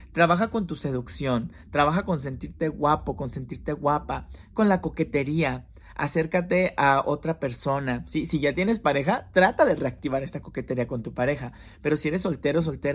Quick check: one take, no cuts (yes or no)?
yes